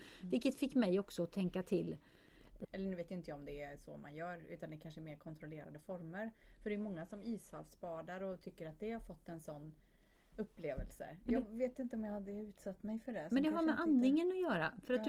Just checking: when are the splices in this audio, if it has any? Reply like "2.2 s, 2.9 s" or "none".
2.6 s